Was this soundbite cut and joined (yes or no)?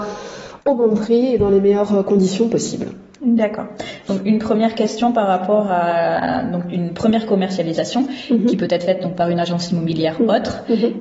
no